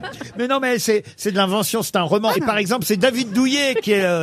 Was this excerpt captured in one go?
no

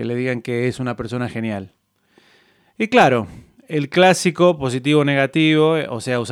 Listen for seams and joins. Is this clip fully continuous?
yes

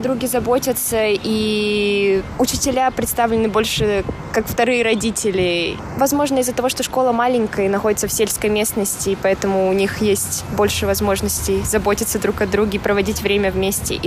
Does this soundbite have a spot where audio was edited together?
no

